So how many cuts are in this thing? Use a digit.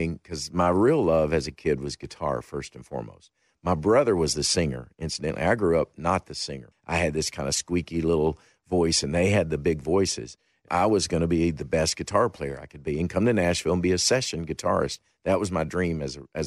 2